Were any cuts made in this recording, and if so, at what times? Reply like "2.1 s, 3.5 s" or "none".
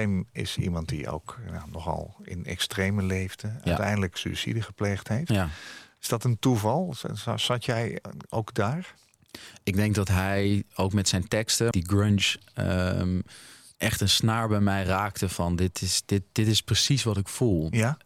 11.7 s

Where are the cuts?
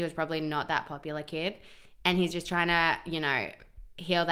none

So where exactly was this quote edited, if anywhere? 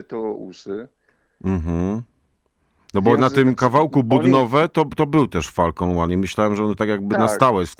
none

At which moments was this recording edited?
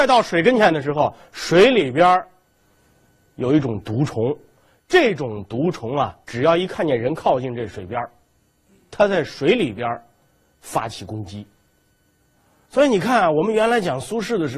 6.2 s

